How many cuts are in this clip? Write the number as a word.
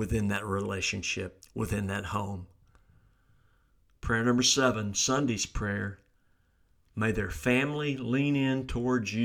one